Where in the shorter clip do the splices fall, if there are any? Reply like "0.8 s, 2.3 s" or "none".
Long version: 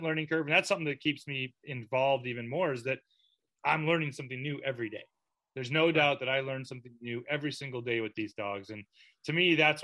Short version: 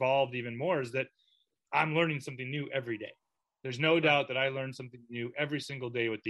none